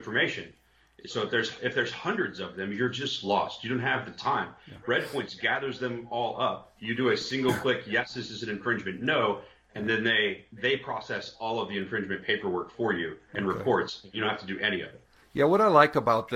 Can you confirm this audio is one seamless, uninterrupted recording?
yes; 0 cuts

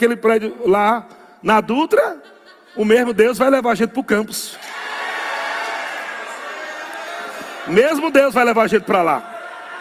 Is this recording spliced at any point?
no; 0 cuts

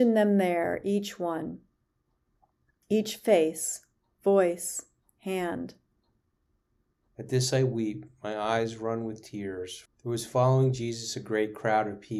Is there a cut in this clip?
yes; 2 cuts; at 7.1 s, 9.9 s

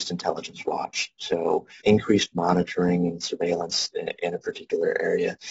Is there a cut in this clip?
yes; 1 cut; at 1.8 s

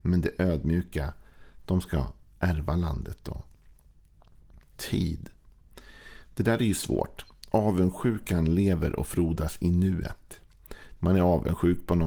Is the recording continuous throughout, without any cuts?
no; 1 cut; at 11.0 s

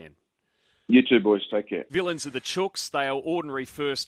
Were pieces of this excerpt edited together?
yes; 1 cut; at 1.9 s

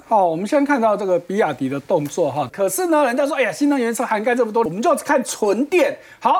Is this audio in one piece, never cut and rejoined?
no; 2 cuts; at 2.5 s, 4.7 s

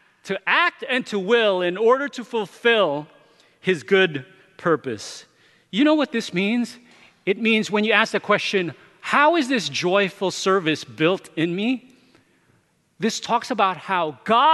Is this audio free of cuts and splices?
yes; 0 cuts

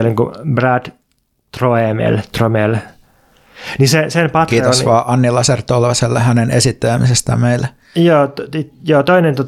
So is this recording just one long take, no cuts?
yes; 0 cuts

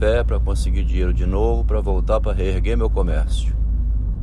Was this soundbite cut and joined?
no; 0 cuts

